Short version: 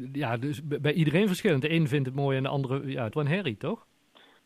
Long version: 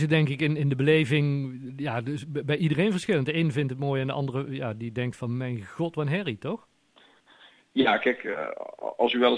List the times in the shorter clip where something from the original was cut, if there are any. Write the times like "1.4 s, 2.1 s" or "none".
3.1 s